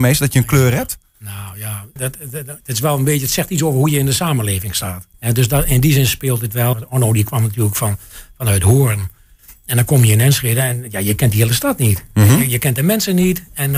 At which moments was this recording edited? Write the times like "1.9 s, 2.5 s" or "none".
2.0 s, 5.1 s, 6.7 s